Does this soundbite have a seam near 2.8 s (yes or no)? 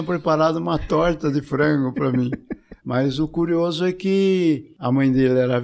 yes